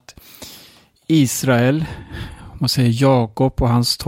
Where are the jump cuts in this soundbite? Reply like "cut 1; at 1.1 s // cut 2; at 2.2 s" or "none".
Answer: none